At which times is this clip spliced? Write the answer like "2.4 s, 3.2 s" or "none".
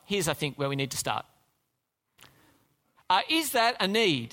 3.0 s